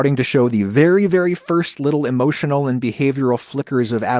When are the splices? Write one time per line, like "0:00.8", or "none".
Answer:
none